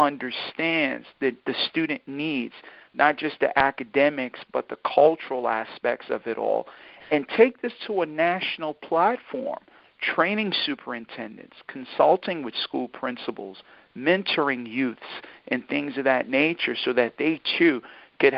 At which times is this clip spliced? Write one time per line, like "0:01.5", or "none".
none